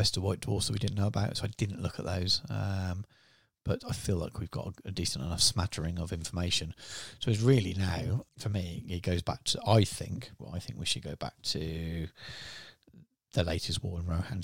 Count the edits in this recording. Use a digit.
2